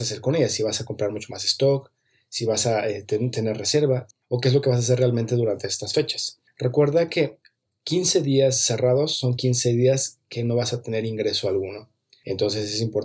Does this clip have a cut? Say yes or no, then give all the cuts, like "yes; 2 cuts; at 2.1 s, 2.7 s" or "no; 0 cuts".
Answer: no; 0 cuts